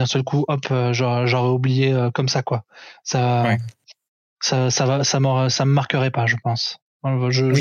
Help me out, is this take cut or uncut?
uncut